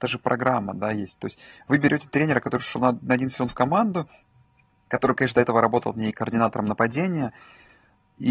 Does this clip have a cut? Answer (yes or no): no